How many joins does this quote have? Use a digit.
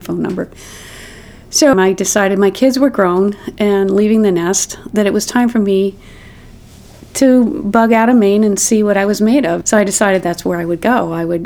2